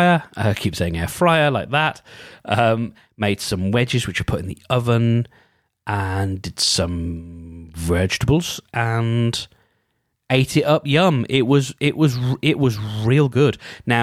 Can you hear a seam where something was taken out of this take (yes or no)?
no